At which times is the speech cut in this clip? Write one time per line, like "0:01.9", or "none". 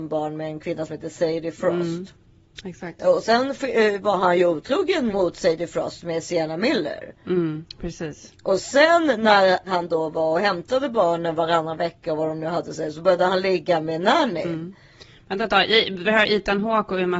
none